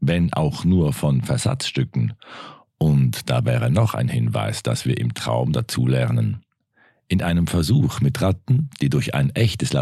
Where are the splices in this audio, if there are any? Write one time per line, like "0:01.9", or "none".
none

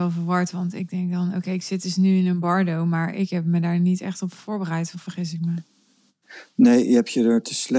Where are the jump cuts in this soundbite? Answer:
0:04.9

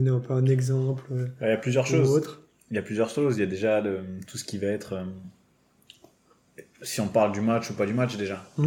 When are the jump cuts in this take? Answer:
none

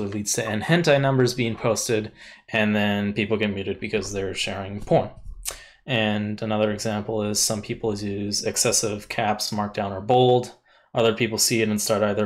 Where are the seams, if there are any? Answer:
none

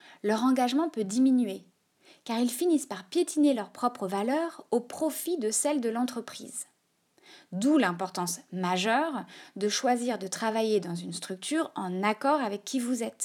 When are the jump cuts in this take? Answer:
none

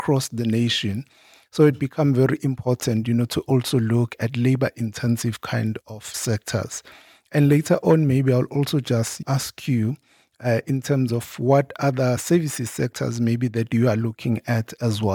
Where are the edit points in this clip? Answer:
none

